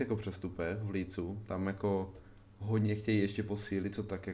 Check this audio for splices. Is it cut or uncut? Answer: uncut